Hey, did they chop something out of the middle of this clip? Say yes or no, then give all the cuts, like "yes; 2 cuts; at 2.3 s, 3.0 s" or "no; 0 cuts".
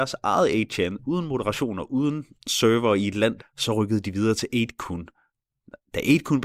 yes; 2 cuts; at 2.3 s, 3.4 s